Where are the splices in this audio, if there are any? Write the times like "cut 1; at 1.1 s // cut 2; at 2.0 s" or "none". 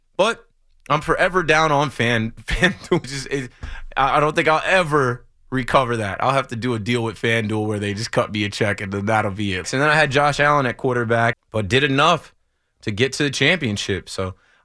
cut 1; at 3.0 s // cut 2; at 9.6 s // cut 3; at 11.3 s

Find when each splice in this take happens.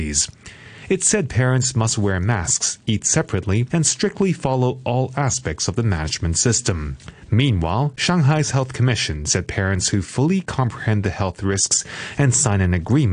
cut 1; at 3.7 s // cut 2; at 7.3 s

